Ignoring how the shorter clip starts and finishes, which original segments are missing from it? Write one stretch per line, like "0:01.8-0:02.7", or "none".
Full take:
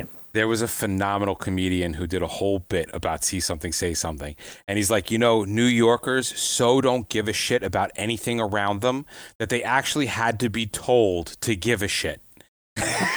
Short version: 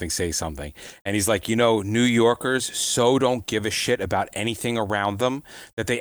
none